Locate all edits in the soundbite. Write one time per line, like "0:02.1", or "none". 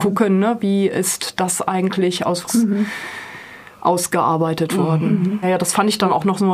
0:02.5
0:05.4